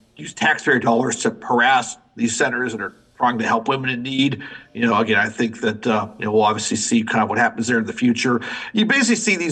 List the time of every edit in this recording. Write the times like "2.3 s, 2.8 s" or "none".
none